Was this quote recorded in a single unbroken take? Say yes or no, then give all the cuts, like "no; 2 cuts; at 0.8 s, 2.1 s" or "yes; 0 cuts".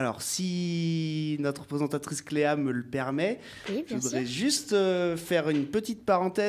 yes; 0 cuts